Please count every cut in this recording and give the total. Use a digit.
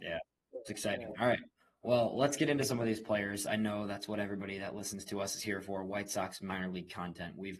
0